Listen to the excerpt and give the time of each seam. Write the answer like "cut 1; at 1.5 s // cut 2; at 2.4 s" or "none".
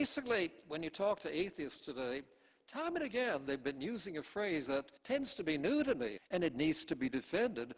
cut 1; at 5.0 s // cut 2; at 6.2 s